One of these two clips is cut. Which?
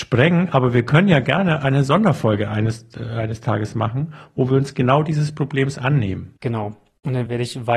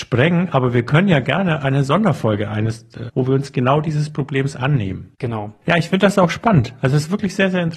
second; 2 cuts; at 3.1 s, 5.6 s

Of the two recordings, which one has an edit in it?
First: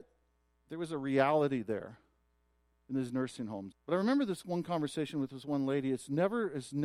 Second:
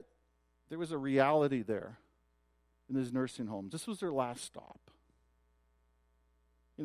first; 1 cut; at 3.7 s

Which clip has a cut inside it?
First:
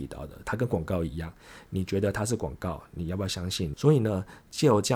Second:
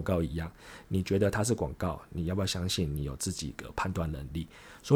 first; 1 cut; at 3.7 s

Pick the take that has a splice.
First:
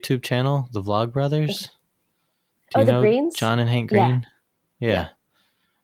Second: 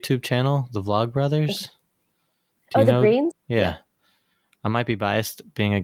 second; 1 cut; at 3.3 s

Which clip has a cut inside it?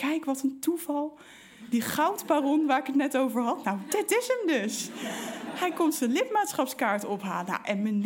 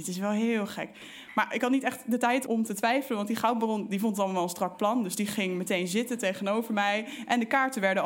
second; 1 cut; at 2.5 s

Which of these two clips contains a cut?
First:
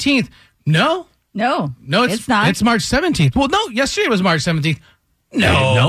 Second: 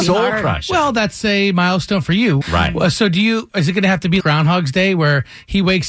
second; 2 cuts; at 2.4 s, 4.2 s

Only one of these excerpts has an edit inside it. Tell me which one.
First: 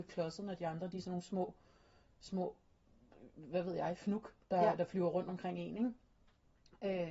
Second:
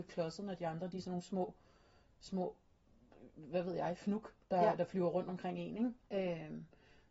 second; 1 cut; at 6.0 s

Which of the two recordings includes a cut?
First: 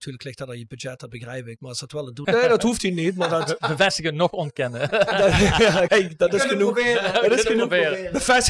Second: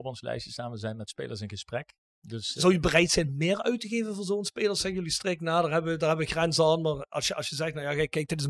first; 2 cuts; at 2.2 s, 5.9 s

